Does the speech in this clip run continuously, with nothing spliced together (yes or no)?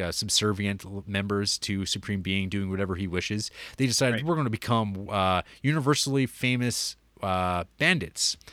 yes